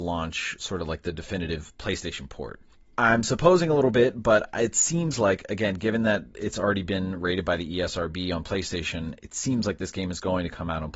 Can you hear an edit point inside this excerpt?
no; 0 cuts

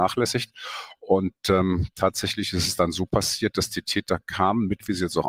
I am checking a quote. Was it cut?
no; 0 cuts

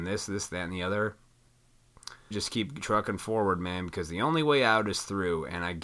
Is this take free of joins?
no; 1 cut; at 2.3 s

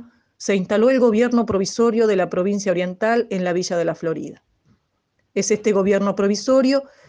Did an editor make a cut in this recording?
no; 0 cuts

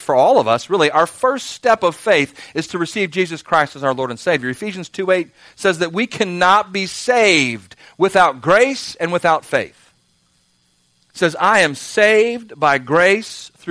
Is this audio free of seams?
yes; 0 cuts

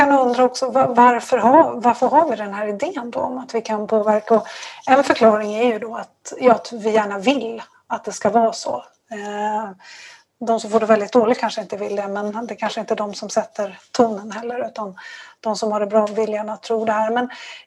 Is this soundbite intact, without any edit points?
yes; 0 cuts

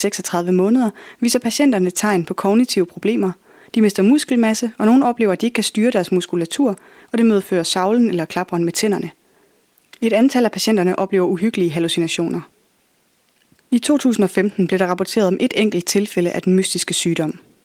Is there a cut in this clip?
no; 0 cuts

